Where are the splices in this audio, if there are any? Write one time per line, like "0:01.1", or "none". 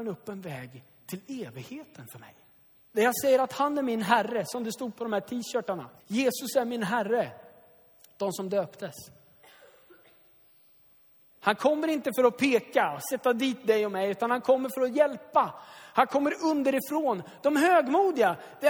0:02.9
0:06.0
0:11.3